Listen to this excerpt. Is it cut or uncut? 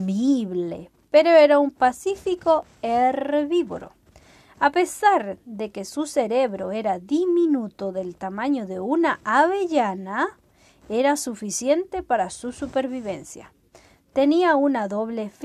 uncut